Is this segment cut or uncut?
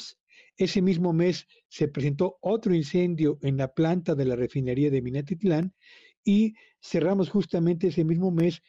uncut